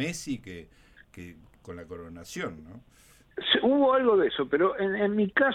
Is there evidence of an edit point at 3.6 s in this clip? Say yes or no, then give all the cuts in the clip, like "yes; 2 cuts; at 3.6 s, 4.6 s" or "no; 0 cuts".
no; 1 cut; at 1.5 s